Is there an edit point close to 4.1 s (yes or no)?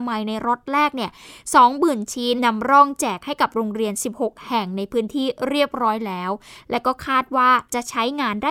no